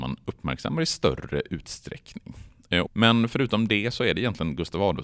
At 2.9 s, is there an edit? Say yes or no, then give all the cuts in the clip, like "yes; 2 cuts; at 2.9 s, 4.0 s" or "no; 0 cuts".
yes; 1 cut; at 2.9 s